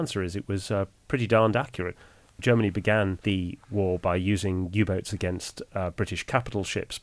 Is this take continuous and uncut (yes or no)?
yes